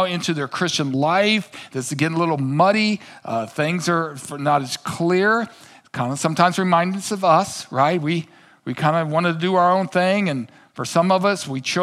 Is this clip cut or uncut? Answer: uncut